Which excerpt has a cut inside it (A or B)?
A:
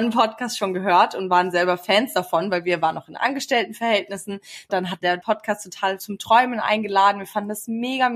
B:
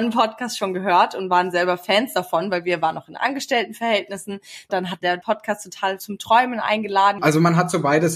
B